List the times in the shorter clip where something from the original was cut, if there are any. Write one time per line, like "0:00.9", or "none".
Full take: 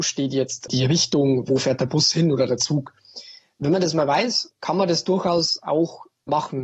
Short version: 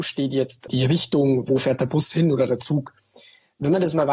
none